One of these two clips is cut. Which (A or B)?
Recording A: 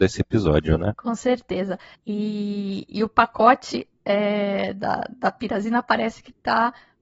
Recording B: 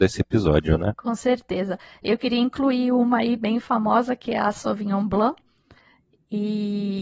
A